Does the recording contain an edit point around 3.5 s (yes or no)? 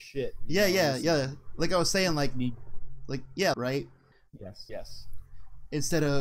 yes